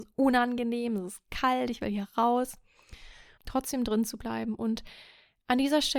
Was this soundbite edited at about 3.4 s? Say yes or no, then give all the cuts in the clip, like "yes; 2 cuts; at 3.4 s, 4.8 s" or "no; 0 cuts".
yes; 1 cut; at 3.4 s